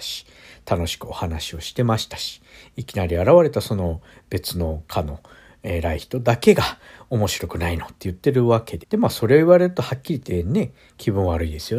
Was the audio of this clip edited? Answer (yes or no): yes